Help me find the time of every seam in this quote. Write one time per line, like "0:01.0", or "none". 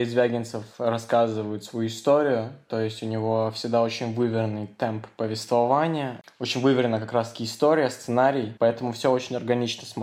0:08.6